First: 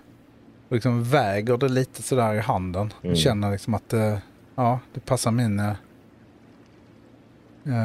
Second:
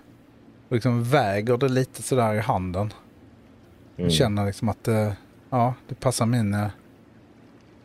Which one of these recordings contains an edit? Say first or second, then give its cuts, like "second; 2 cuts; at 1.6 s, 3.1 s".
first; 1 cut; at 3.0 s